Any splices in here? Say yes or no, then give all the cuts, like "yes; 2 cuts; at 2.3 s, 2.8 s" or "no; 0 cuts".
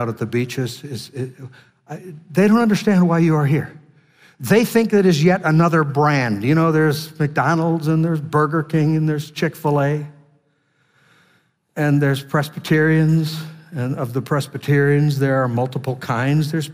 no; 0 cuts